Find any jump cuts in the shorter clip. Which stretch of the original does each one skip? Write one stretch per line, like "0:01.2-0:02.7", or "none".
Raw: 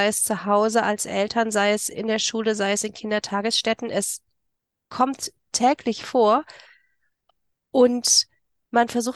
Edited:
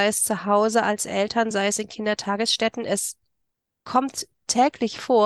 0:01.5-0:02.6